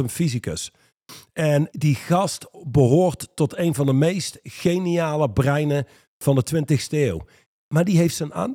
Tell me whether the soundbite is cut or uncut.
cut